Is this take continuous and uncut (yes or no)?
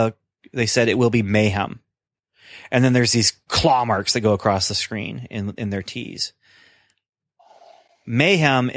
yes